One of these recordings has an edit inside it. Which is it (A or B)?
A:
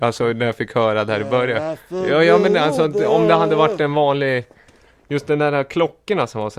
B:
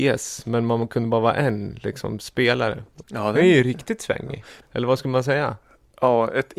B